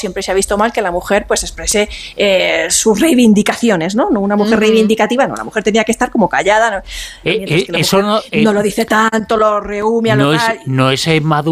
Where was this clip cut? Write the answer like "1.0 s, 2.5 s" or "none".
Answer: 7.2 s